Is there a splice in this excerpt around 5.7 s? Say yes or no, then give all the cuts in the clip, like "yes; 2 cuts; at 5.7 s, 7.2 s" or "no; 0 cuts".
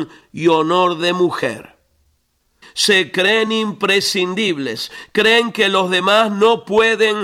no; 1 cut; at 2.6 s